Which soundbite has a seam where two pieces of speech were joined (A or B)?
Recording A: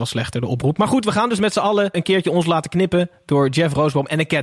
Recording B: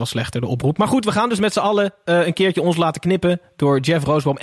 A